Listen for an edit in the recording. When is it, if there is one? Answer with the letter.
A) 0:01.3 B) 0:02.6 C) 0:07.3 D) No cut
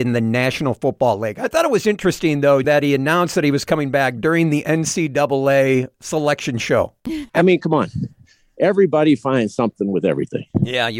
B